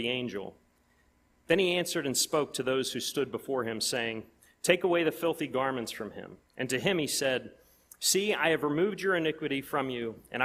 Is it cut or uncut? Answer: uncut